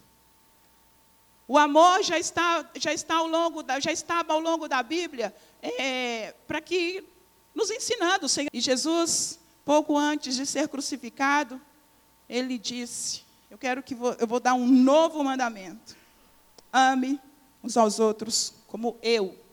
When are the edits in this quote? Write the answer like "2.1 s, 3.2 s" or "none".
8.5 s